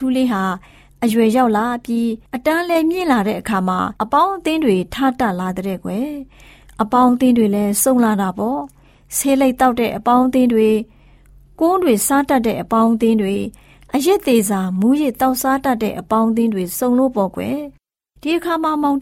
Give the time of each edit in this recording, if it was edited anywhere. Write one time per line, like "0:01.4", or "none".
0:02.3
0:04.0